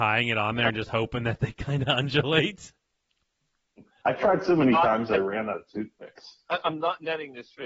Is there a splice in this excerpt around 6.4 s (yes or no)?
no